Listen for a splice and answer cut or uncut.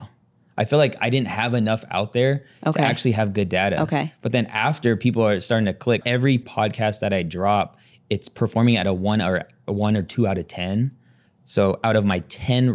cut